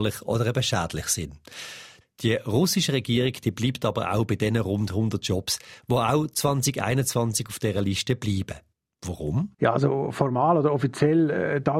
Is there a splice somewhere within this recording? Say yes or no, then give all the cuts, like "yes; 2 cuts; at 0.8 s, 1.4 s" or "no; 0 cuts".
yes; 1 cut; at 9.5 s